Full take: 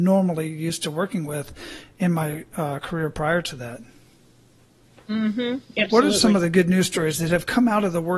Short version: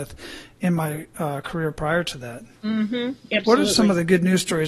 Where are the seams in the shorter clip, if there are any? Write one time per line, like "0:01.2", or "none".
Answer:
0:02.6